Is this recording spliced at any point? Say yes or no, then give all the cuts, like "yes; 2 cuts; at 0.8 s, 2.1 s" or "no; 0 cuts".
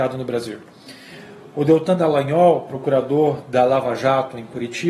no; 0 cuts